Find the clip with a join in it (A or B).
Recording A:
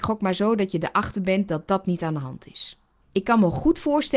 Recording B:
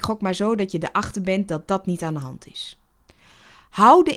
A